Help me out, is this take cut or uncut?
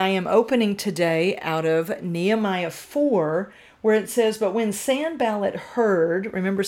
uncut